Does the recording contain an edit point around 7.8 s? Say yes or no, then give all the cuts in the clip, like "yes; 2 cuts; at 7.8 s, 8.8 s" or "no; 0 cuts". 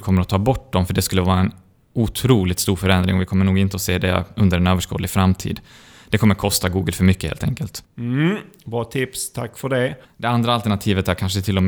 yes; 2 cuts; at 7.8 s, 10.0 s